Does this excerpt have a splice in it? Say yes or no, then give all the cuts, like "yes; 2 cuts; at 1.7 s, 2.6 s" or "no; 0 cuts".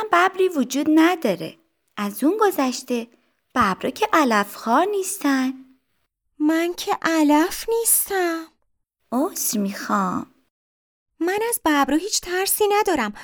no; 0 cuts